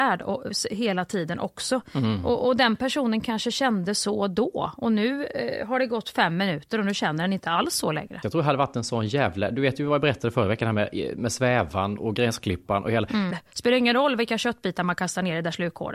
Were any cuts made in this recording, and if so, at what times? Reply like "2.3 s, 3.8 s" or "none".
8.2 s, 13.3 s

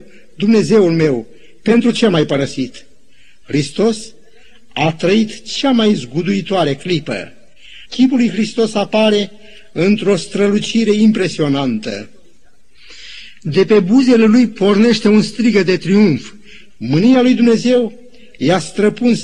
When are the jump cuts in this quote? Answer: 7.8 s, 16.7 s

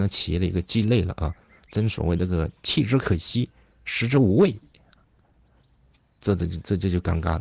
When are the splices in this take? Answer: none

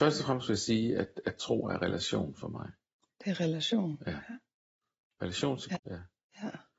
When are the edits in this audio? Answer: 5.8 s

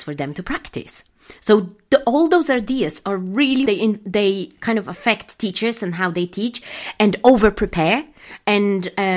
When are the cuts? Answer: 3.7 s

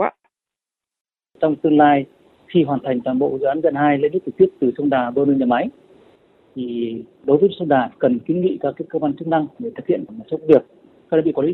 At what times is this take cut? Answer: none

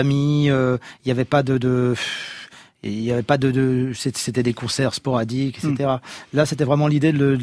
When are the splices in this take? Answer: none

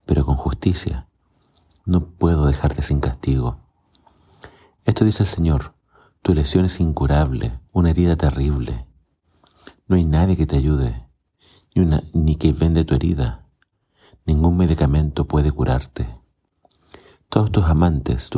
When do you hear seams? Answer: 7.7 s

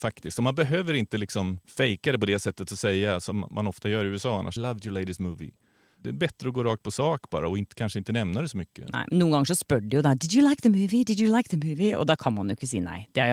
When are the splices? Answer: 4.6 s

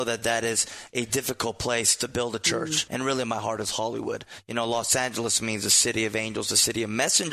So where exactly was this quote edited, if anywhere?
2.9 s

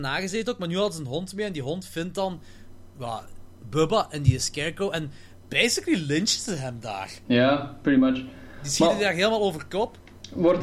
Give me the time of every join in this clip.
none

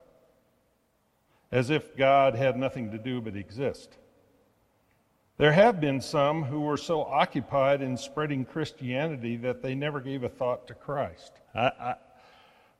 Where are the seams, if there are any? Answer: 11.4 s

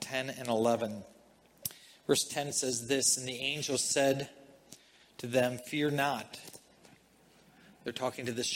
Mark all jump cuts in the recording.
none

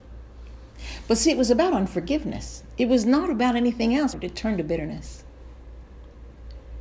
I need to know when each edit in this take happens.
4.1 s

